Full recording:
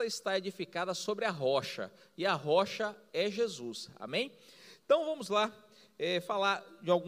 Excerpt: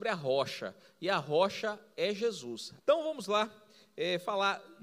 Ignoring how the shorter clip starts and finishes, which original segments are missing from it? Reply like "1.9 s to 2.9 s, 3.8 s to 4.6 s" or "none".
4.0 s to 4.8 s